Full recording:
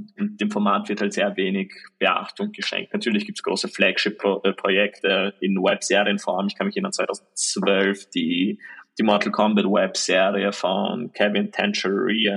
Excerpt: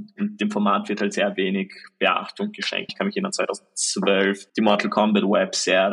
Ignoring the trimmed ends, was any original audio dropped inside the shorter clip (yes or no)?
yes